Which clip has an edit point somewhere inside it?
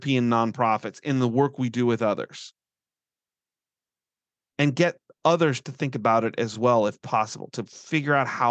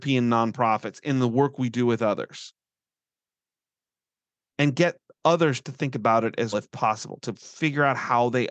second; 1 cut; at 6.5 s

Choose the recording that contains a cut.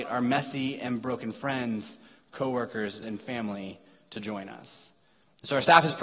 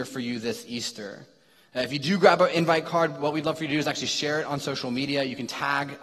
first; 1 cut; at 3.0 s

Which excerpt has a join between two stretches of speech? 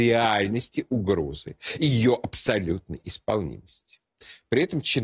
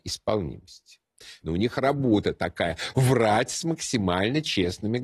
second; 1 cut; at 1.4 s

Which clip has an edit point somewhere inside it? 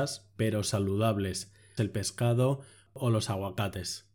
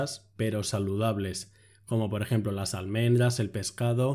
first; 1 cut; at 1.8 s

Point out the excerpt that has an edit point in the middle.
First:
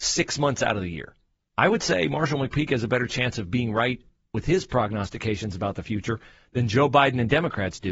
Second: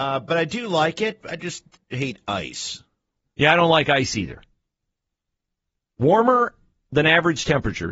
first; 1 cut; at 1.4 s

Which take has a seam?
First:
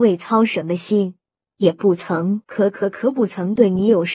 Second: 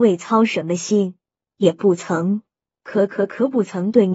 first; 1 cut; at 2.4 s

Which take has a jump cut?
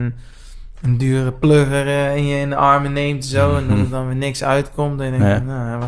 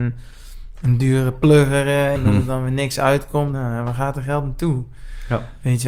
second; 2 cuts; at 2.1 s, 3.5 s

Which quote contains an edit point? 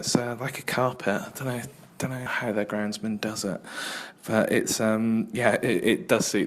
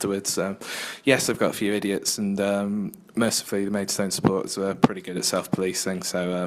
first; 1 cut; at 2.3 s

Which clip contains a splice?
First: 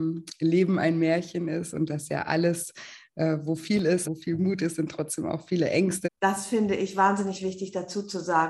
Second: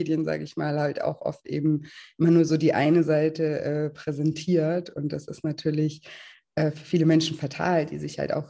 first; 2 cuts; at 4.0 s, 6.0 s

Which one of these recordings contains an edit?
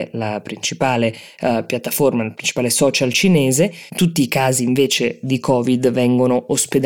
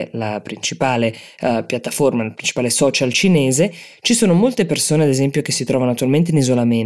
first; 1 cut; at 3.9 s

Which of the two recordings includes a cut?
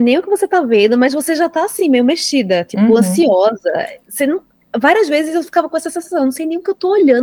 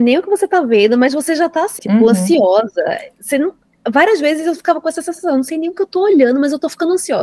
second; 1 cut; at 1.8 s

